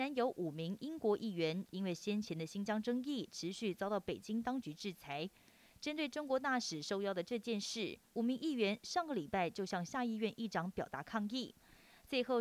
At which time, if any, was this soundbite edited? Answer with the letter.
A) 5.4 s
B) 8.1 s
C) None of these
C